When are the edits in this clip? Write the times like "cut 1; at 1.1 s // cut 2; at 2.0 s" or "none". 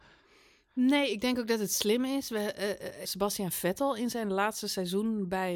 cut 1; at 3.0 s